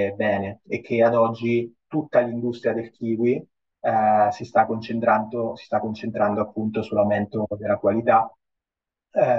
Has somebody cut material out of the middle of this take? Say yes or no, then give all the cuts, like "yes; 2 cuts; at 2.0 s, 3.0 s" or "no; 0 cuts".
no; 0 cuts